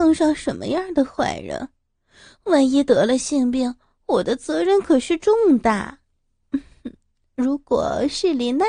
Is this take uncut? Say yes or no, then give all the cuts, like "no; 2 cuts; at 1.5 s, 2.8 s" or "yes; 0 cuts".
yes; 0 cuts